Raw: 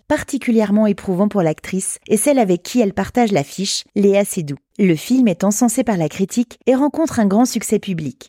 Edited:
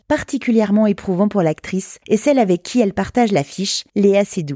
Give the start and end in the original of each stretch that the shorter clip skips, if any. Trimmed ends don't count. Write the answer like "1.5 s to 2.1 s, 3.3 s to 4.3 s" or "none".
none